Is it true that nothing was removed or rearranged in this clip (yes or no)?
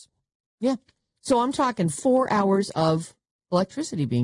yes